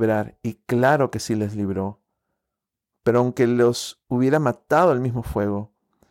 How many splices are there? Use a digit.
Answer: 1